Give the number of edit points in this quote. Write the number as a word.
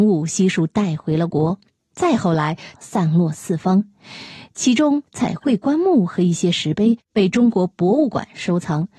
one